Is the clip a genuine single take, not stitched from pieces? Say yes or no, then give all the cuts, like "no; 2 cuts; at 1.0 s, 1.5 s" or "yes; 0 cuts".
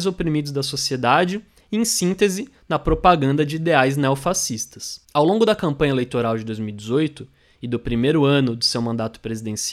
no; 1 cut; at 5.0 s